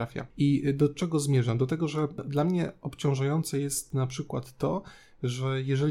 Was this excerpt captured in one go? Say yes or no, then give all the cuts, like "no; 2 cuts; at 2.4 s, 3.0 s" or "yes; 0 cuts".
yes; 0 cuts